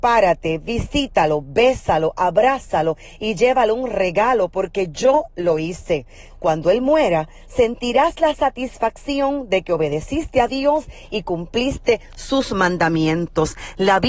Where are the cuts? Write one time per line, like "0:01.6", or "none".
0:06.3